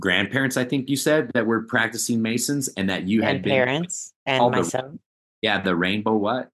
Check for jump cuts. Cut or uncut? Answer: uncut